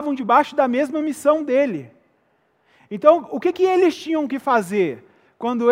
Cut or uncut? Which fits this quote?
uncut